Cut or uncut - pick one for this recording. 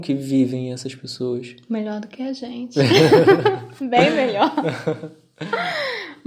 uncut